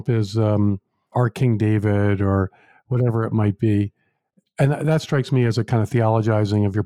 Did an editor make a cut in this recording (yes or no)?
yes